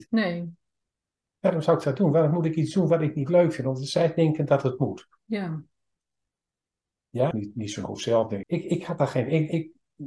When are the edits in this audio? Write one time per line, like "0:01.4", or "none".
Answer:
0:07.3
0:08.4